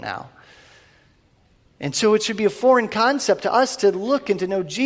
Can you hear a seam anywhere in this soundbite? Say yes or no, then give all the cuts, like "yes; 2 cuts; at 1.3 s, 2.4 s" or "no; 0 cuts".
no; 0 cuts